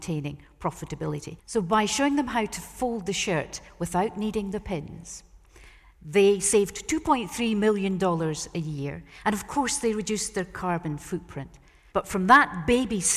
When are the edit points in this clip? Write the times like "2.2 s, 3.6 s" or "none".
1.4 s, 11.9 s